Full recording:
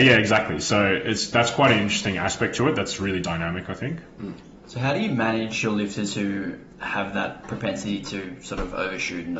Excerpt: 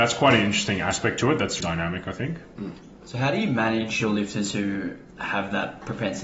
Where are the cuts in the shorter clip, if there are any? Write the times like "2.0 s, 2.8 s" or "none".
1.6 s